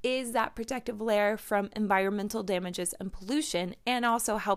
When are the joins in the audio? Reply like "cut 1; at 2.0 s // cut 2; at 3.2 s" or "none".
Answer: none